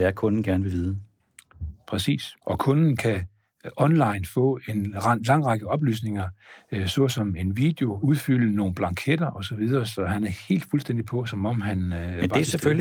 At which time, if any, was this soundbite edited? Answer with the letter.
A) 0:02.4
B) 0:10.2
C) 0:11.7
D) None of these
A